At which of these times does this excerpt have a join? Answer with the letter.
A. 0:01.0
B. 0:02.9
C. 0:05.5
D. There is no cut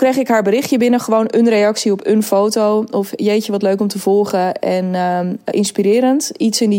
C